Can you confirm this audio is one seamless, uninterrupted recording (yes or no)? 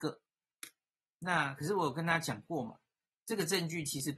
no